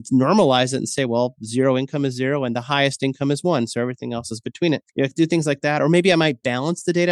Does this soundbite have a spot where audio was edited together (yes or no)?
yes